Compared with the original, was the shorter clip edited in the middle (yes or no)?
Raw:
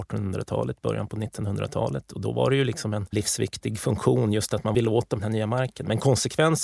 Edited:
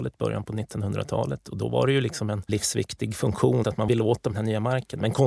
yes